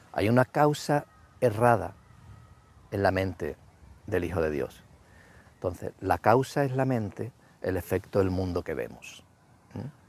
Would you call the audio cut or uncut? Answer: cut